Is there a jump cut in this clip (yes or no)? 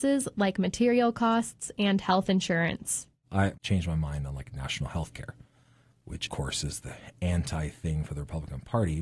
no